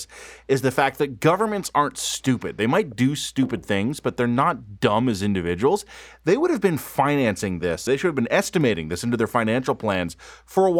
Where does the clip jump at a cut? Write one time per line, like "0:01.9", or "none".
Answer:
0:07.9

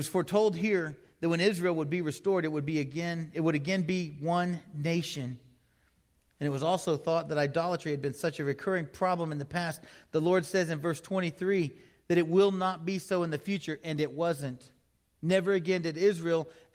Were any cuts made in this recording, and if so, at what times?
none

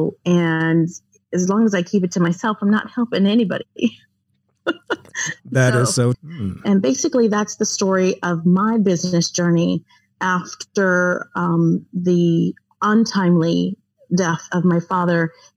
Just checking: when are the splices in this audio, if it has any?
0:06.1

